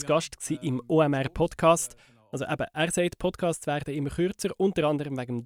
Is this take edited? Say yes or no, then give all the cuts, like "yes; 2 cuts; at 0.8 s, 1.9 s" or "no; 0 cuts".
no; 0 cuts